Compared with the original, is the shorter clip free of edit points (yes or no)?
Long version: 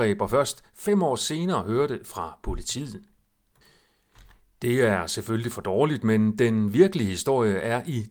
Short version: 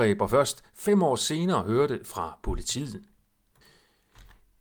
yes